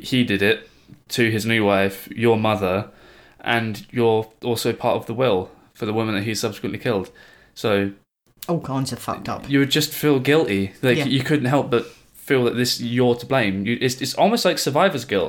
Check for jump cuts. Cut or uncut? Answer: uncut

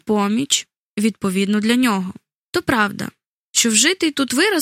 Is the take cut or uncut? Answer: cut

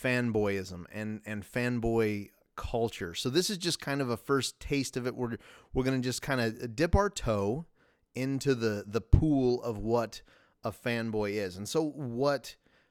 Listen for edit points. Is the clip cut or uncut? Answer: uncut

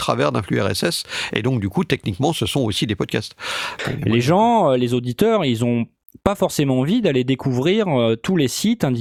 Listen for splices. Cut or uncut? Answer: cut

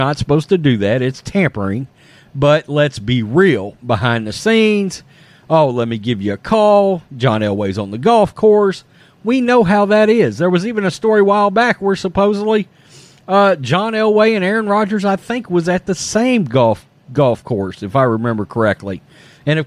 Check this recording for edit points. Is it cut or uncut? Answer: uncut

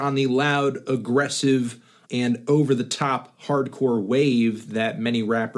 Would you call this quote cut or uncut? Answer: cut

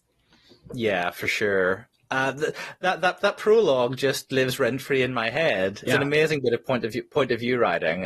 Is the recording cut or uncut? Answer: cut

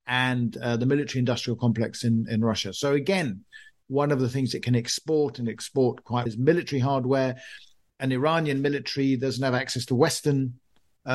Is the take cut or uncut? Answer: cut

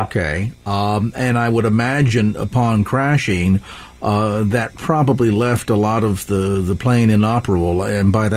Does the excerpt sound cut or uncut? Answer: uncut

